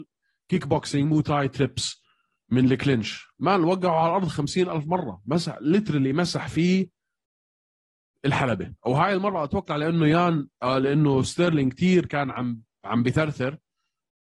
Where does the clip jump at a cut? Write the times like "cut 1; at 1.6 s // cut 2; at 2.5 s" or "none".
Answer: cut 1; at 8.8 s